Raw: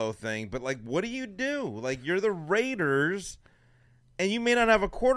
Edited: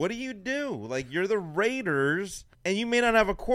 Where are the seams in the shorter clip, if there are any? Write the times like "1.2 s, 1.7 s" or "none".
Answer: 2.5 s